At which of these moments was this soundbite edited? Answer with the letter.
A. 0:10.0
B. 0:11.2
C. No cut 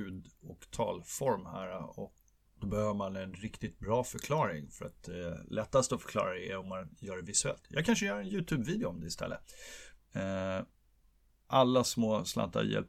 A